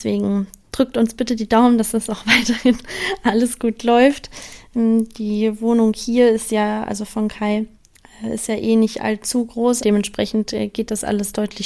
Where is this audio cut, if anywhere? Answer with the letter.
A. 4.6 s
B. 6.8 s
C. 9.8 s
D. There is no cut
C